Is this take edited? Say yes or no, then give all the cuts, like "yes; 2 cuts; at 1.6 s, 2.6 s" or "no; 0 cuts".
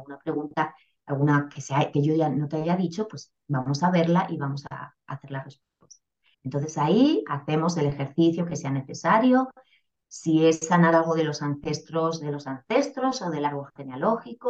yes; 1 cut; at 6.3 s